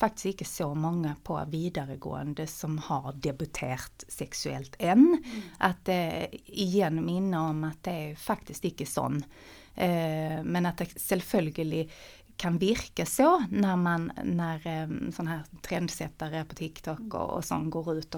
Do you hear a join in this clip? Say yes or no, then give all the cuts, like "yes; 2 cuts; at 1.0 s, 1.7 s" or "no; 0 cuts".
no; 0 cuts